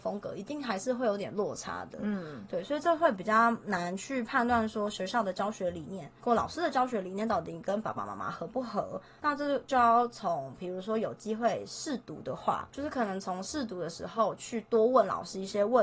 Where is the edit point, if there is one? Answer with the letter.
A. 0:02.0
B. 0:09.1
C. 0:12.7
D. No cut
D